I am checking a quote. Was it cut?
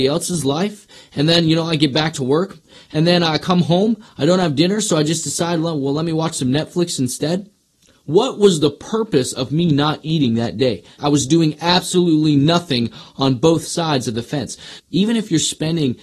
yes; 2 cuts; at 11.0 s, 14.8 s

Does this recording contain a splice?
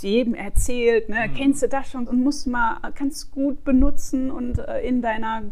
yes; 1 cut; at 2.1 s

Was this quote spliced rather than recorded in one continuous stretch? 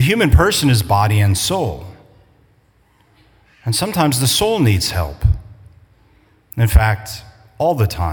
no; 0 cuts

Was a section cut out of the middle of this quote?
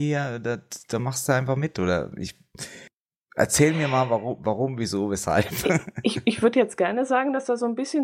no; 0 cuts

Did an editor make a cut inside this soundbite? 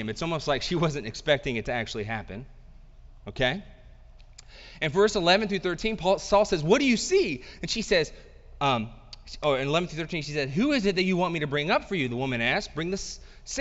no; 0 cuts

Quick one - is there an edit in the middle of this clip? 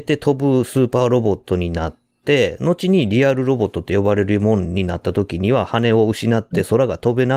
no; 0 cuts

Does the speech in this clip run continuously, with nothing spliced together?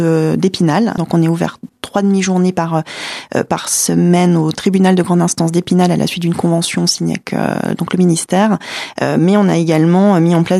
no; 2 cuts; at 1.0 s, 8.9 s

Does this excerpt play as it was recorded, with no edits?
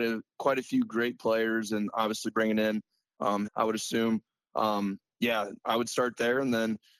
no; 1 cut; at 3.5 s

